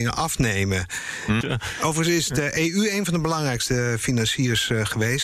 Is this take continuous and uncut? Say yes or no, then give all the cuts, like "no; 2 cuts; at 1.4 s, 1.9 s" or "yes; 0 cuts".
no; 1 cut; at 1.4 s